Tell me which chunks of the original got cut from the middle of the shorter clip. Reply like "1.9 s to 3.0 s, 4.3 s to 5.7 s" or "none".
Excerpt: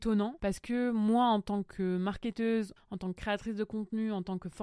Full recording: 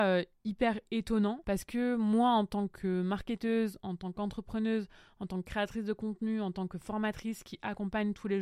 3.8 s to 5.1 s